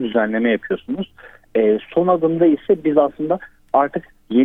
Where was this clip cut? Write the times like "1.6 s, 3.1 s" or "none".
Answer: none